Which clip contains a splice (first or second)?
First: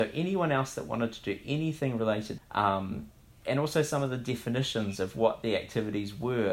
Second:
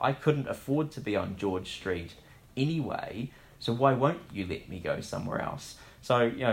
first